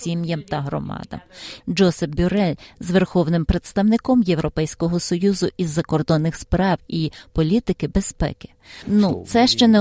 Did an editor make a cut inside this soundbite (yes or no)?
yes